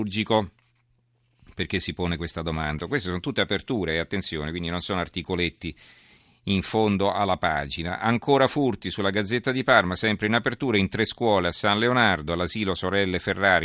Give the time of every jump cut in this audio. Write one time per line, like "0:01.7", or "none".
0:02.8